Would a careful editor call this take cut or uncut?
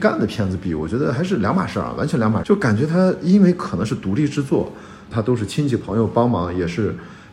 cut